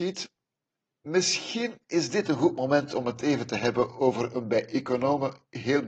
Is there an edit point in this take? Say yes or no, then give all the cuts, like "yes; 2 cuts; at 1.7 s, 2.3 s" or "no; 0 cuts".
no; 0 cuts